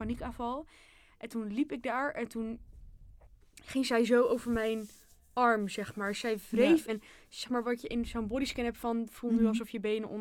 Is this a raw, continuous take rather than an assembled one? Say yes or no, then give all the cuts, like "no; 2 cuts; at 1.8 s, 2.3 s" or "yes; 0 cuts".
no; 1 cut; at 6.9 s